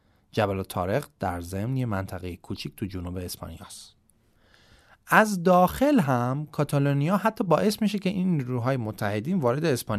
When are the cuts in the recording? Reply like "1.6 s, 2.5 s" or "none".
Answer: none